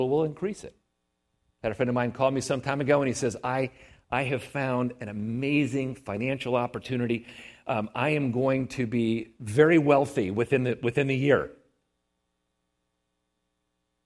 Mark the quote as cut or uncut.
uncut